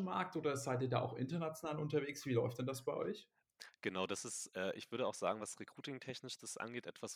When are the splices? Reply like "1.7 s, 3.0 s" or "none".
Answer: none